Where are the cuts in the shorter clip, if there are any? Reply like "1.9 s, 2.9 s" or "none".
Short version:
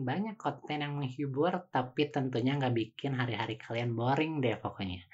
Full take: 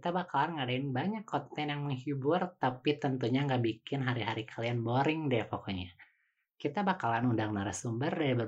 none